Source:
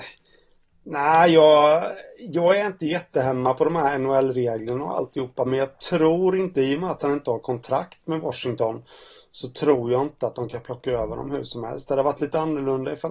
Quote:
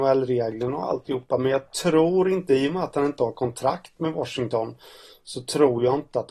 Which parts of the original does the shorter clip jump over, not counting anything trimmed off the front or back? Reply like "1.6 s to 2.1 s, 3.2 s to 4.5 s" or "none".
none